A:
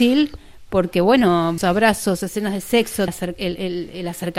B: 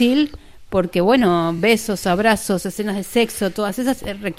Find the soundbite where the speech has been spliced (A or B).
A